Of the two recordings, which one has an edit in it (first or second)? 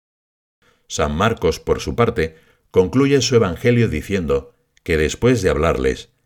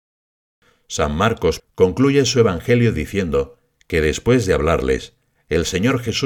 second